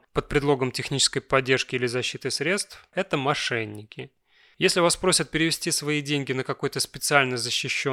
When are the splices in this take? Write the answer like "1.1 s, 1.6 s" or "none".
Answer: 2.9 s